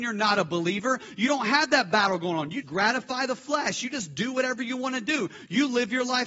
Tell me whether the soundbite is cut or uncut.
cut